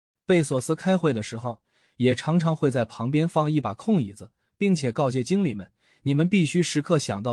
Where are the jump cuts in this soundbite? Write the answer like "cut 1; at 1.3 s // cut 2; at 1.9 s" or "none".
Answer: none